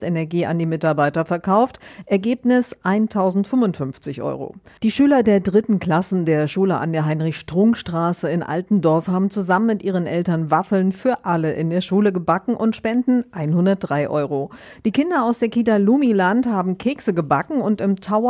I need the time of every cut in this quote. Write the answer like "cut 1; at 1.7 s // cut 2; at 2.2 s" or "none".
cut 1; at 4.8 s